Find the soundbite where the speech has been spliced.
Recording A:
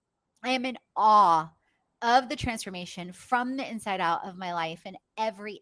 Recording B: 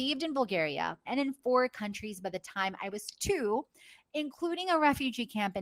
B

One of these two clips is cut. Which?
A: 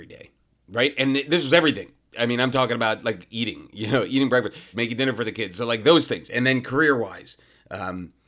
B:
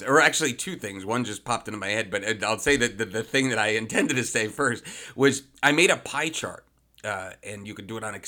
A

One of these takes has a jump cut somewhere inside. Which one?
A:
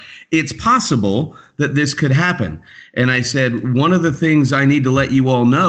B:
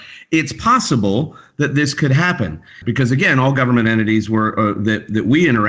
B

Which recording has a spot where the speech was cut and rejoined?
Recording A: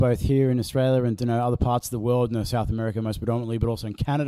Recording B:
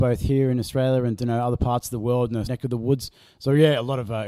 B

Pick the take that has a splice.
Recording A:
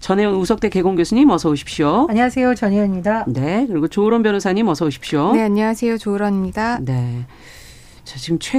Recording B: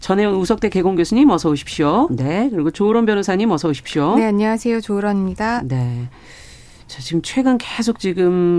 B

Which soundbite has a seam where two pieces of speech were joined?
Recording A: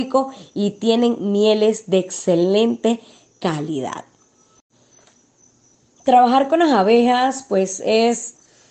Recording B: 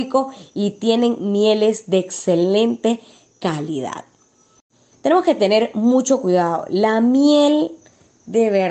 B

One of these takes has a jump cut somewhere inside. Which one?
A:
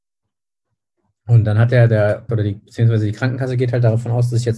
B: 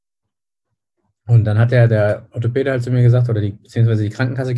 A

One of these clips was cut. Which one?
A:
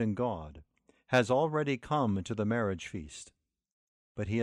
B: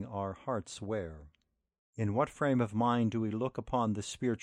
B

